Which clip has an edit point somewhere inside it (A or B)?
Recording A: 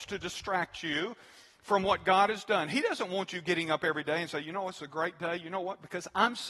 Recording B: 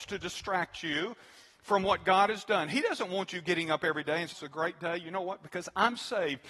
B